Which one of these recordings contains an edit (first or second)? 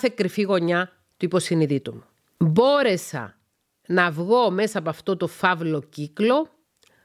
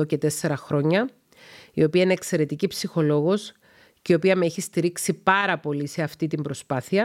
first